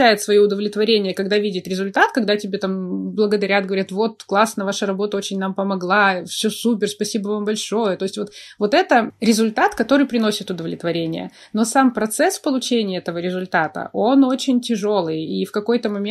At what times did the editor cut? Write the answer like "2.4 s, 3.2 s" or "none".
none